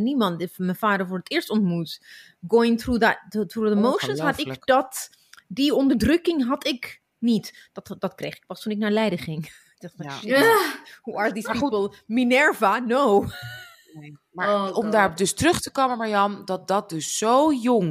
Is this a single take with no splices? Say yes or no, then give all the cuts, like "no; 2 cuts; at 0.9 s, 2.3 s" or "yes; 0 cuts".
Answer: yes; 0 cuts